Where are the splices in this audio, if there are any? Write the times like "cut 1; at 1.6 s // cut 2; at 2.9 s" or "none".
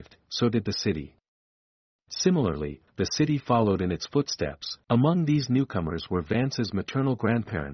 cut 1; at 2.9 s // cut 2; at 4.8 s